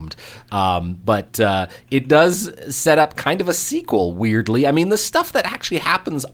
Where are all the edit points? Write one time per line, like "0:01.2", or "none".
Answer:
none